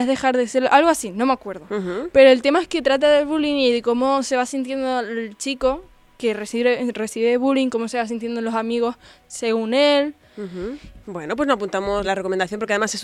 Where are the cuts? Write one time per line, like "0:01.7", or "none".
0:11.0
0:12.0